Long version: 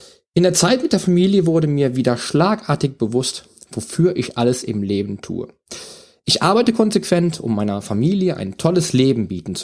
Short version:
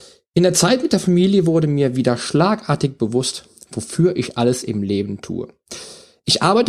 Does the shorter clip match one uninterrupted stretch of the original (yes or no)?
yes